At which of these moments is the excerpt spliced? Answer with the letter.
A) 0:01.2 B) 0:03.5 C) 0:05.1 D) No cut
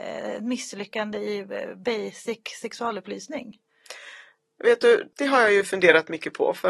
C